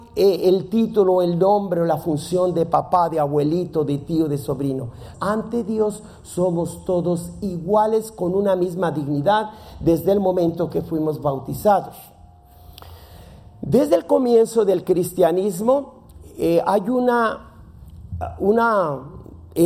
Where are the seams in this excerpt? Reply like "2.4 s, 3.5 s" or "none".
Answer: 5.1 s